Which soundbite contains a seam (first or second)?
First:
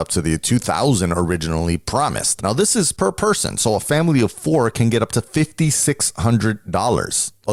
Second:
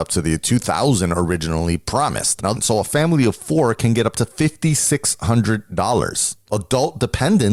second